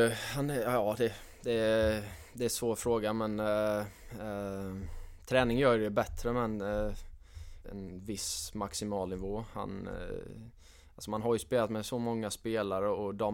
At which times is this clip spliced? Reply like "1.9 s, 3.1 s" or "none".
7.6 s